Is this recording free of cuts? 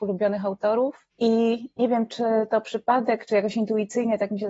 no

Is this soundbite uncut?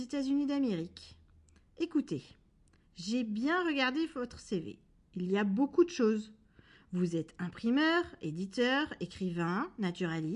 yes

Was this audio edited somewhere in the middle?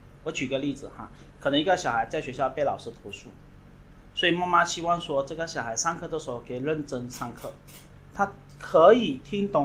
yes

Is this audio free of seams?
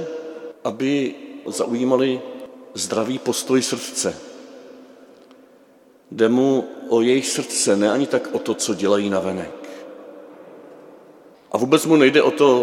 no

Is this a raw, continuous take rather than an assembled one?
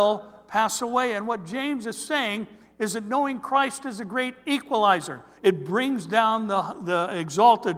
no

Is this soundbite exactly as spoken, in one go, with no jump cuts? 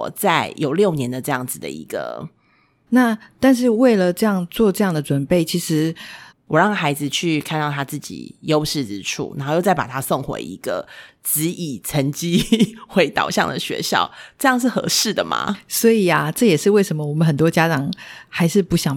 no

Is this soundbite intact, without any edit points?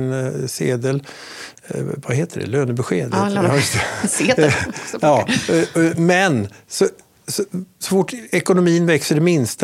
yes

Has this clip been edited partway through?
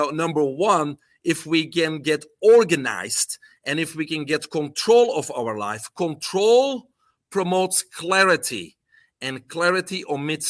no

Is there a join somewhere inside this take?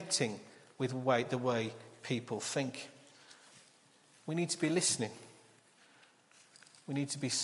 no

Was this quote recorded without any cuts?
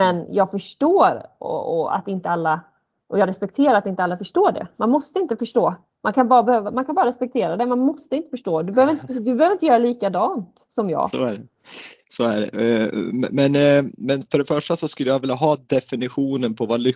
yes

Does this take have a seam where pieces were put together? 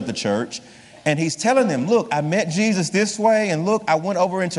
no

